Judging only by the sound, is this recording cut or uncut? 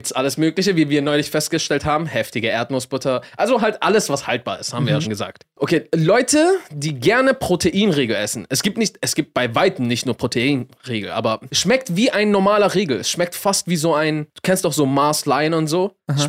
cut